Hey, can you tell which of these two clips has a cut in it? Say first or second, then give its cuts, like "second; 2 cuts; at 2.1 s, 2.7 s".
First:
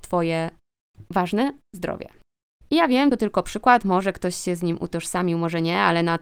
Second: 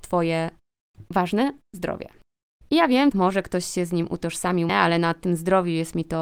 second; 2 cuts; at 3.1 s, 4.7 s